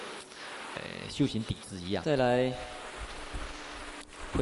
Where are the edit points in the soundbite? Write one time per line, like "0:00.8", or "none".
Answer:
0:02.0